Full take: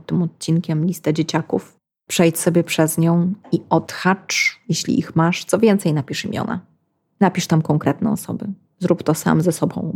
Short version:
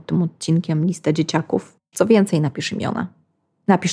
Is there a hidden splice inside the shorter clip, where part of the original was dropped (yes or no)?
yes